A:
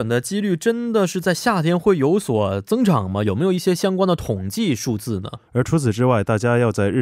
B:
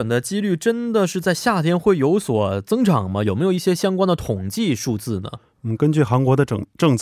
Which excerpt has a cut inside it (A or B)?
A